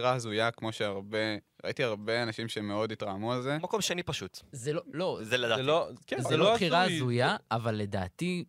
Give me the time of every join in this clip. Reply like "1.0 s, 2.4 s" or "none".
none